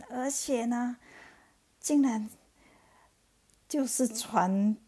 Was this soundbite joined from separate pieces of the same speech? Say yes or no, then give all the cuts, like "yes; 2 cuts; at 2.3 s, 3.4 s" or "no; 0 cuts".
no; 0 cuts